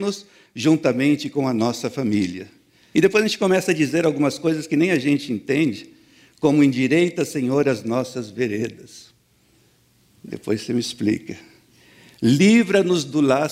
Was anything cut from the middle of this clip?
yes; 1 cut; at 2.9 s

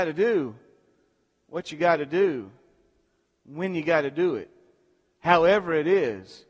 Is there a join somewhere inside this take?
no; 0 cuts

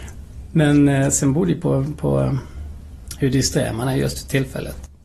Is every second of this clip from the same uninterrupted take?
yes; 0 cuts

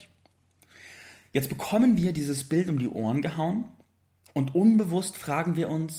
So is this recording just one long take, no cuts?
yes; 0 cuts

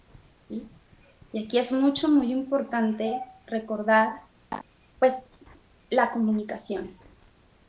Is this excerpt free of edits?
yes; 0 cuts

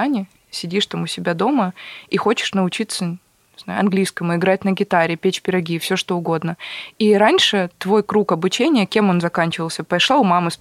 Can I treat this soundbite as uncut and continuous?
yes; 0 cuts

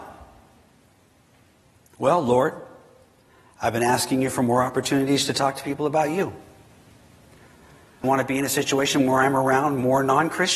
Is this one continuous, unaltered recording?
no; 1 cut; at 8.0 s

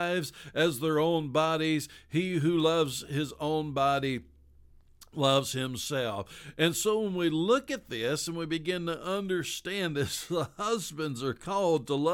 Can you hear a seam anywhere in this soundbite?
no; 0 cuts

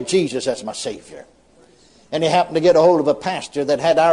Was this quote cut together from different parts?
no; 0 cuts

